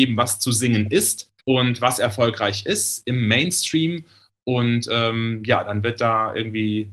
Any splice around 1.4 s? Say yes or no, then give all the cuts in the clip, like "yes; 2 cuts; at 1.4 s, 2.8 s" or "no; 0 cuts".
yes; 1 cut; at 1.4 s